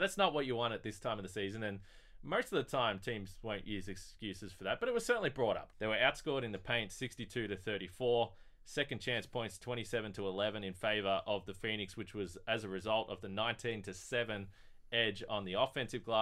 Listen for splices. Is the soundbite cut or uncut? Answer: cut